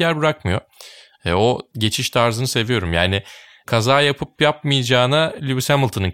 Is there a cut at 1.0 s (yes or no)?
no